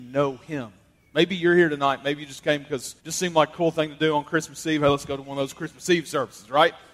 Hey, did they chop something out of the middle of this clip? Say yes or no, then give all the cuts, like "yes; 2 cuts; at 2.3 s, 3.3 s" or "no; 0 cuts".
yes; 1 cut; at 3.0 s